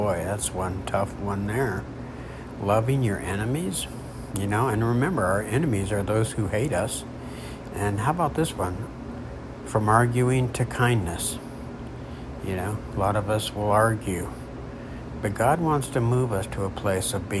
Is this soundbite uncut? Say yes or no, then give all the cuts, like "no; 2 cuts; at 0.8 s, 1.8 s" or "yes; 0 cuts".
yes; 0 cuts